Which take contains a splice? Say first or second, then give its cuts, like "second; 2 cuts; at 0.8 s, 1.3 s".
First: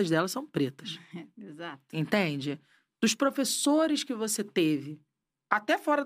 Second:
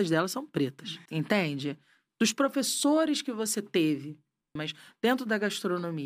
second; 2 cuts; at 1.1 s, 4.6 s